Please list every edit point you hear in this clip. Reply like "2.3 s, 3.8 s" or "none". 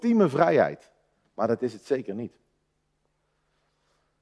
none